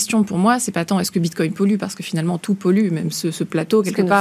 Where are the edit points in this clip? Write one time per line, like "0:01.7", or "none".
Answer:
none